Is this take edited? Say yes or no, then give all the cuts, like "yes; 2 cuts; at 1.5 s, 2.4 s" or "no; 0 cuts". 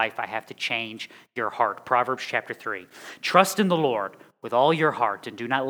no; 0 cuts